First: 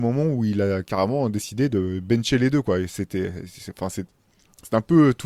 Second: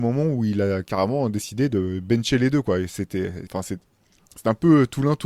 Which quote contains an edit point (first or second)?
second